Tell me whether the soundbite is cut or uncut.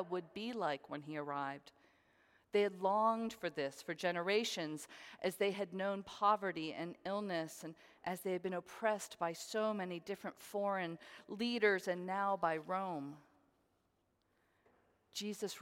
uncut